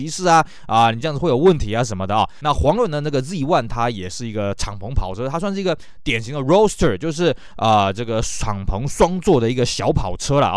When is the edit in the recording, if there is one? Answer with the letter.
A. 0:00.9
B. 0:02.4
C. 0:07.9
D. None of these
B